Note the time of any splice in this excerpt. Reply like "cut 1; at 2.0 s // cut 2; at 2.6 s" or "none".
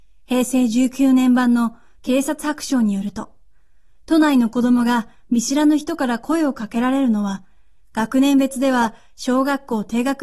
none